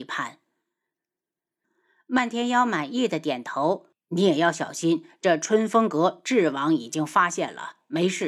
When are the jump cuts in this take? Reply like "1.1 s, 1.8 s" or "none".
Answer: 1.6 s